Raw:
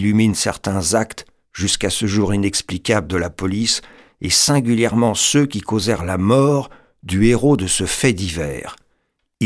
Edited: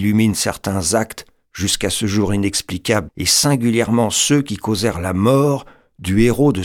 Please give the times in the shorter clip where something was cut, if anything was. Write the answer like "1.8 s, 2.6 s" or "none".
3.1 s